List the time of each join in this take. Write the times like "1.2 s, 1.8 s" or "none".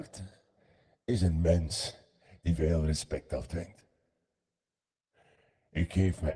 none